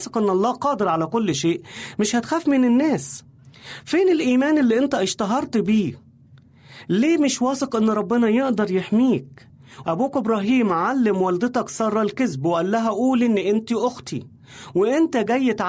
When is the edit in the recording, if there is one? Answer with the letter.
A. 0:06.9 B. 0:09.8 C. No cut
B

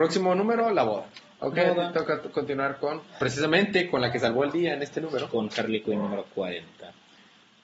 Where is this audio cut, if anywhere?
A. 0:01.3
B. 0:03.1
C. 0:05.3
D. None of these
A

